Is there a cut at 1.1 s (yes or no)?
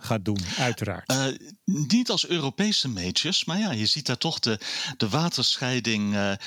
no